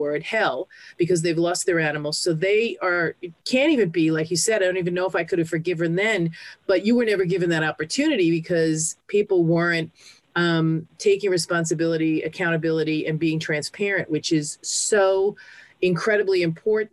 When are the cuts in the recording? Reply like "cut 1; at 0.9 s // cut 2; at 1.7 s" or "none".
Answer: none